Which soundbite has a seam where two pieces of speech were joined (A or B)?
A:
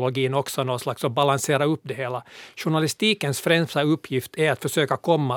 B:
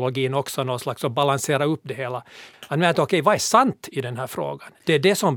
B